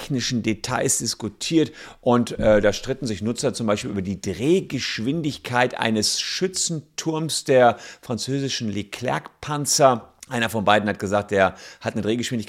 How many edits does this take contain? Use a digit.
1